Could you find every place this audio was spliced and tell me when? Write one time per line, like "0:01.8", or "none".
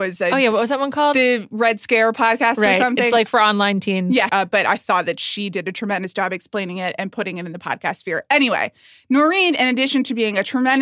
0:04.3

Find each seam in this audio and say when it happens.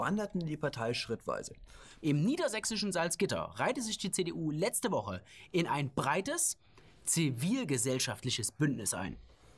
0:02.0

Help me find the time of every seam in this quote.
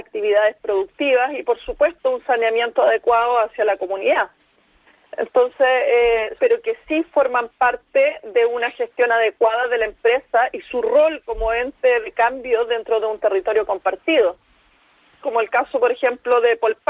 0:06.4
0:15.2

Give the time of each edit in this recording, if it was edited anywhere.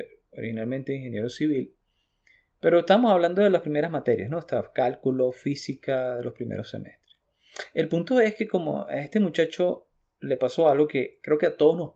none

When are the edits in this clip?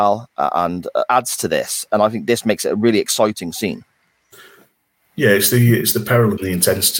0:01.1

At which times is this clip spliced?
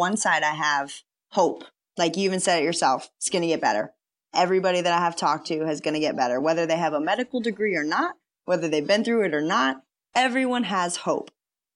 none

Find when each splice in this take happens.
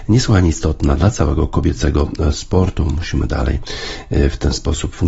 none

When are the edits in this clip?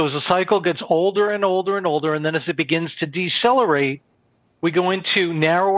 none

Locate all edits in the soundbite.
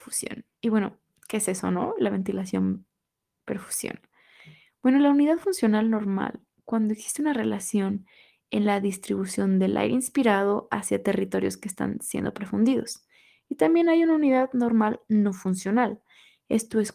none

